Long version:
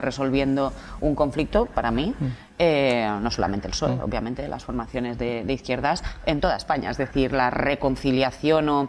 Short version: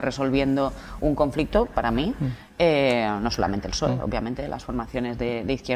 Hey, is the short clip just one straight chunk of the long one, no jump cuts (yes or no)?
yes